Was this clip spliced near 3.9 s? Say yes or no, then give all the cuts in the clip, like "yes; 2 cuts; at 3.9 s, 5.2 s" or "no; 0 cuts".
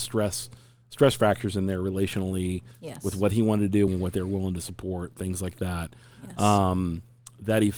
yes; 1 cut; at 3.9 s